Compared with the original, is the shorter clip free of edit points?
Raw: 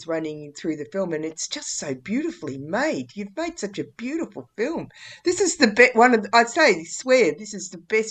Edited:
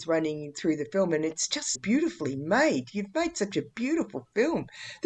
no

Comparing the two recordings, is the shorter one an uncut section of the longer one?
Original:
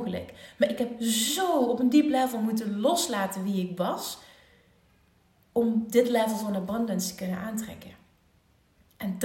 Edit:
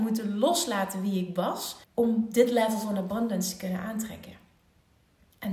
no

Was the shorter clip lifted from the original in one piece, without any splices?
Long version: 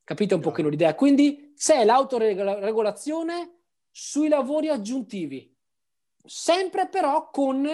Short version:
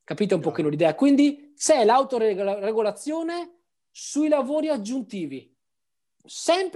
yes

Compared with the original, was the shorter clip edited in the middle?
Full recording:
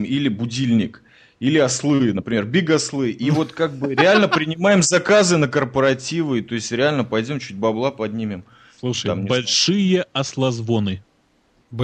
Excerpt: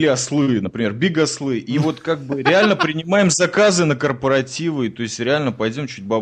no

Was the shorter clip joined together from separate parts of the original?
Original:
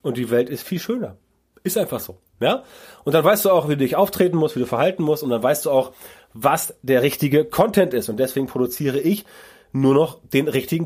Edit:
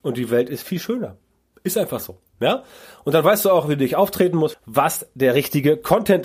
yes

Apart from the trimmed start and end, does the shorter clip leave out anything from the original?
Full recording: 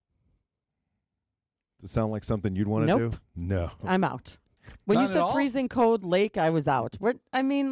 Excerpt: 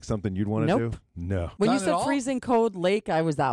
yes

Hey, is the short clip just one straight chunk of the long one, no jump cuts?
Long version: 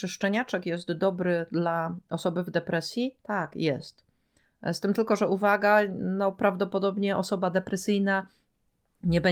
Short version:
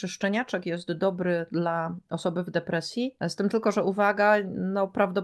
no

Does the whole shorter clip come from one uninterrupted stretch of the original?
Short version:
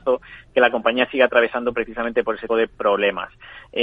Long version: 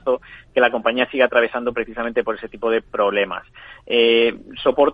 no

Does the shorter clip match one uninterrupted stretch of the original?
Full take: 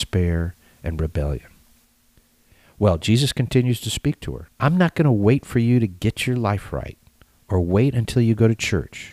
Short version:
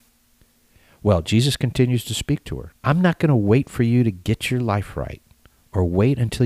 yes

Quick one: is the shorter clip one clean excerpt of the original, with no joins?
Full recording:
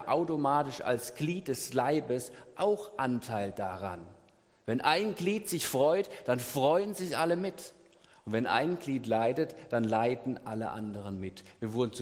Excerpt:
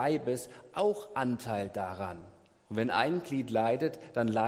no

